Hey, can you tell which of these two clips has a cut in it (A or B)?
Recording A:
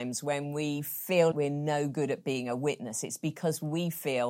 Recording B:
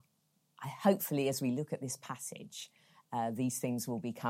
A